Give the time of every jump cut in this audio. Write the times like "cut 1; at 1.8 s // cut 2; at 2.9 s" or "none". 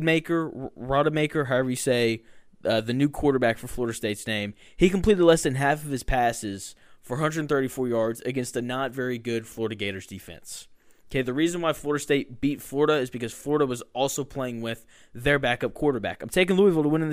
none

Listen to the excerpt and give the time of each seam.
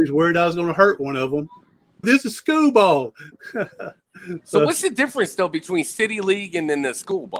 cut 1; at 2.0 s

